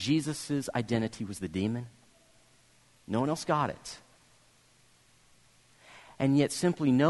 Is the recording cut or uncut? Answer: uncut